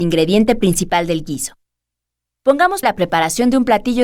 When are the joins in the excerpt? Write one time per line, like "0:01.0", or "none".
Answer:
0:02.8